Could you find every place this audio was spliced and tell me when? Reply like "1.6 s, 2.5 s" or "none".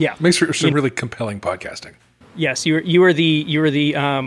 2.2 s